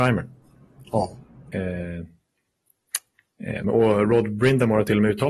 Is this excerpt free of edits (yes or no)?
no